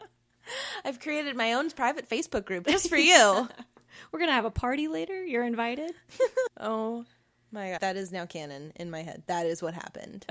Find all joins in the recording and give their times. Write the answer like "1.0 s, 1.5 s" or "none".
6.5 s, 7.8 s